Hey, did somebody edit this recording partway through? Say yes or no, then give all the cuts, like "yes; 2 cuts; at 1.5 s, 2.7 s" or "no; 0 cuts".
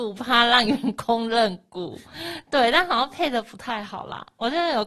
no; 0 cuts